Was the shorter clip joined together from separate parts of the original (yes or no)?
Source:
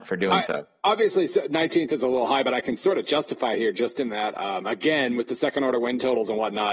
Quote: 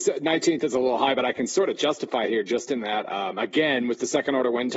no